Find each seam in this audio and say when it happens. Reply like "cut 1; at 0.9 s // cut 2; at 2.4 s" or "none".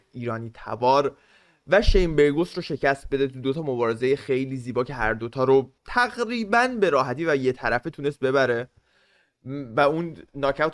cut 1; at 5.8 s